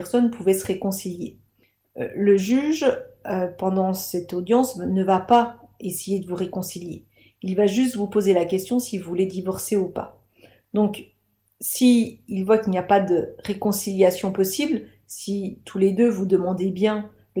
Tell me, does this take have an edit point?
no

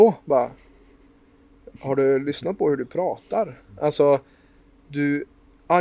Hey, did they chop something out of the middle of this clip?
no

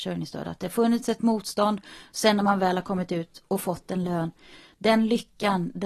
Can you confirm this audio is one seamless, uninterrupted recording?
yes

